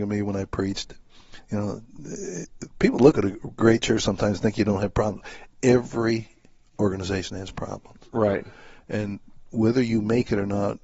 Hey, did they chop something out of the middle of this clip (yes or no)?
no